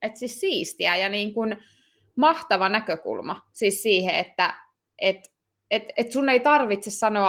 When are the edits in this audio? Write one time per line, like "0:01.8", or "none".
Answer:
0:05.9

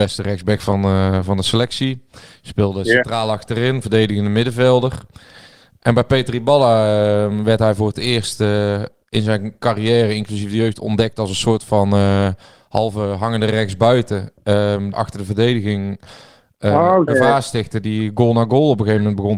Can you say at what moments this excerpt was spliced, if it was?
0:14.9
0:17.1

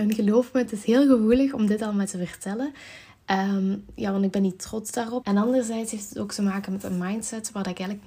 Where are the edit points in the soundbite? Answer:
0:05.2

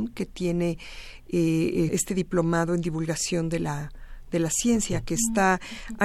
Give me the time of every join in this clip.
0:01.9

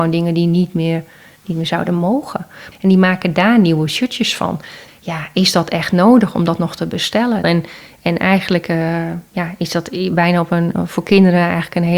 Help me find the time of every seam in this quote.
0:02.7
0:04.9
0:07.4

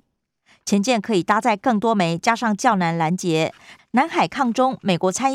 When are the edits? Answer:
0:03.8

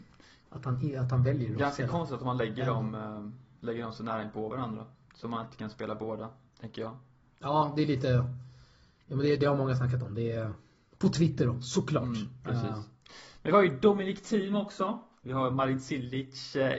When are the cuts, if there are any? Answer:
none

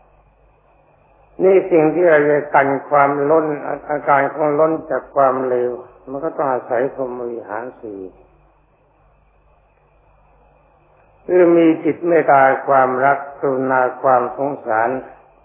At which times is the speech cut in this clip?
0:12.2

